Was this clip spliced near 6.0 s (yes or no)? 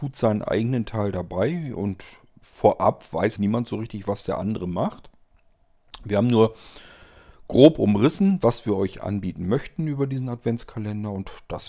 no